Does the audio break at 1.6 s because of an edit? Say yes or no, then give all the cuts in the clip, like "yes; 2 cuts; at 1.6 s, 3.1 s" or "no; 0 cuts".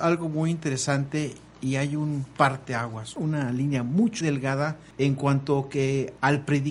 no; 1 cut; at 4.2 s